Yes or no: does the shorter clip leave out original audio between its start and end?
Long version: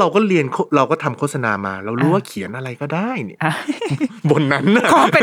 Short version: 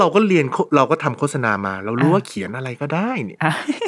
no